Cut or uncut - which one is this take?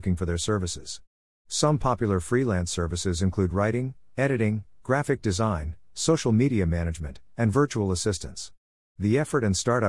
uncut